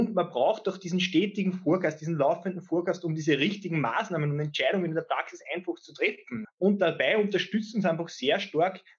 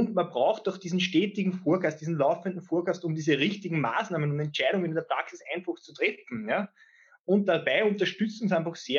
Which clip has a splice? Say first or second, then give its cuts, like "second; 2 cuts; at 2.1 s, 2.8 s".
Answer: first; 1 cut; at 6.4 s